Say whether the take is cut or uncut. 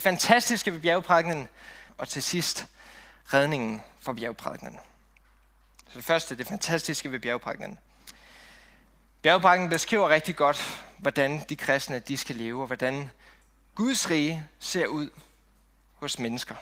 cut